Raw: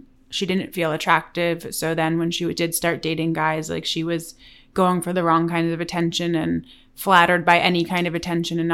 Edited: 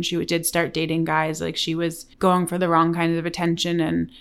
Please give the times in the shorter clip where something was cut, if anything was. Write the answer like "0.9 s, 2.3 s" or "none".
2.1 s